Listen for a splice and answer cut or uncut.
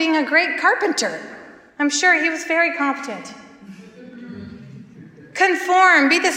uncut